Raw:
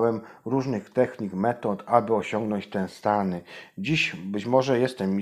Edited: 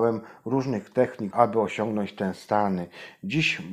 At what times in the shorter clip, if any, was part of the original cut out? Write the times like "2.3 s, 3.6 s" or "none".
1.3 s